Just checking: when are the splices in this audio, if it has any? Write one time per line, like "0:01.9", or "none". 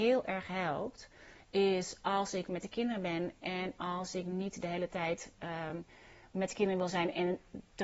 none